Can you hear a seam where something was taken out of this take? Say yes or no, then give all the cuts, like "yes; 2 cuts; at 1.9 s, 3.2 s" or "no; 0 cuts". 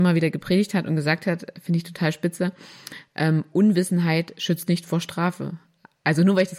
no; 0 cuts